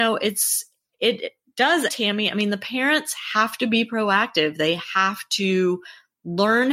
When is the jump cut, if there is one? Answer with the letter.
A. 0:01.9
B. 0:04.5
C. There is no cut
A